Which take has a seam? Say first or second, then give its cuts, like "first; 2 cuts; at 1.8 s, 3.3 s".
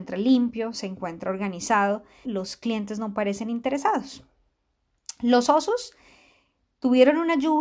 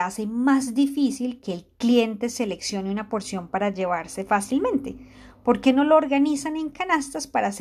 first; 1 cut; at 2.2 s